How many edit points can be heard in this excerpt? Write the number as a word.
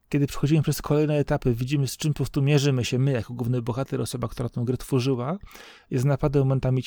zero